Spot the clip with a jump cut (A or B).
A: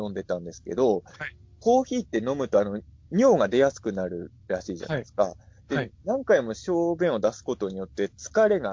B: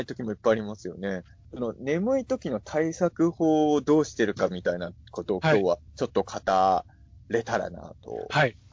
B